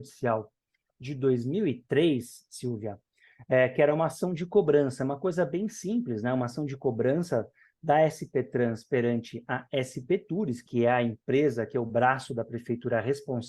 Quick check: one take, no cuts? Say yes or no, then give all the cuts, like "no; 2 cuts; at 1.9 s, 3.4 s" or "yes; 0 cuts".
yes; 0 cuts